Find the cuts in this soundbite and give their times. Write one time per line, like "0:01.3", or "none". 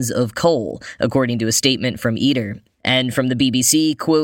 0:02.7